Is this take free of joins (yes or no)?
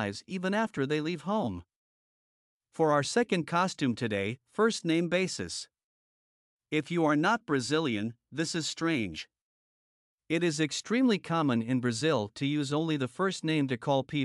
yes